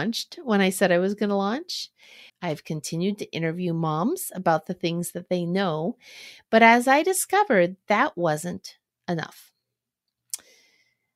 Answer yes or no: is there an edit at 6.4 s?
no